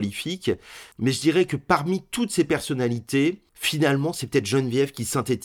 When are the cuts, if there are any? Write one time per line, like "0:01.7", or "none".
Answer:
0:00.9
0:03.5